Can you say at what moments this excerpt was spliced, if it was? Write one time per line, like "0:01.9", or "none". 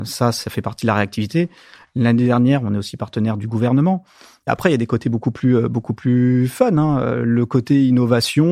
0:04.5

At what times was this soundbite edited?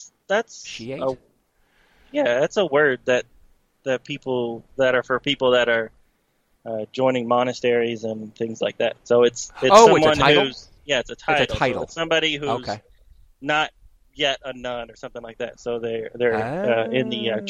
none

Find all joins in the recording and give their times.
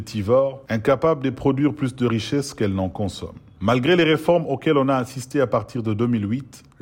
none

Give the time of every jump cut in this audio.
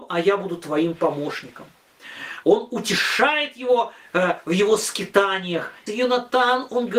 0:02.4
0:05.9

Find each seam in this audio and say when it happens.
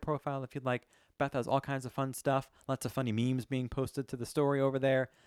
none

